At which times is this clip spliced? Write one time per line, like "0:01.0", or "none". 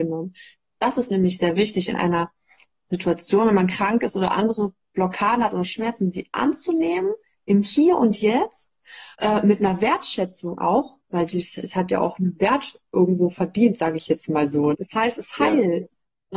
0:09.1
0:14.7

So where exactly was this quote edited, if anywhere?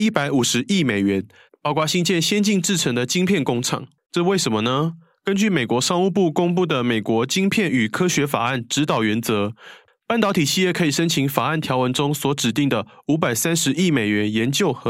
0:01.5
0:04.0

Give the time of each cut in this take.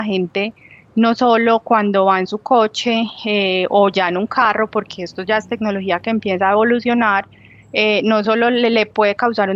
none

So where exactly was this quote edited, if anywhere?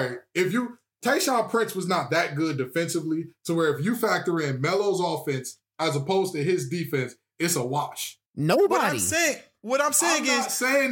0:08.3

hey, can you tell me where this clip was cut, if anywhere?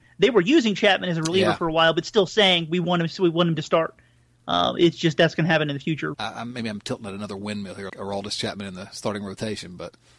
0:06.1
0:07.9

